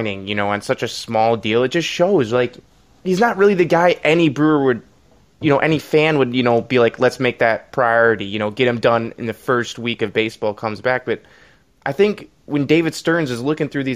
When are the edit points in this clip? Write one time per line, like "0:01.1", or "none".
none